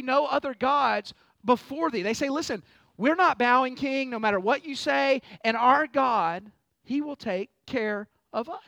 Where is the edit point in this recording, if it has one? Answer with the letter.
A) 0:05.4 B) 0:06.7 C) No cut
B